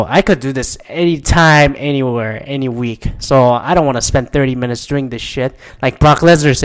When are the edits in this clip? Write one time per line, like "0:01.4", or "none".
none